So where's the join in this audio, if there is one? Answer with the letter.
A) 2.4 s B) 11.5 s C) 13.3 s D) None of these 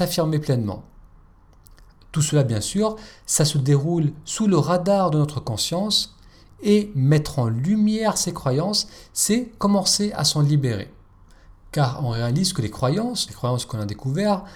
C